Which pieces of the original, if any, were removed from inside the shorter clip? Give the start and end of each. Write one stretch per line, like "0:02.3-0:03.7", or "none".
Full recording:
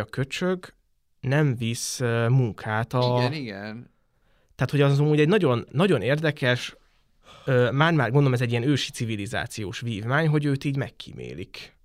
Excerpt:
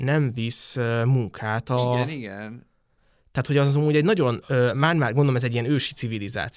0:05.7-0:07.4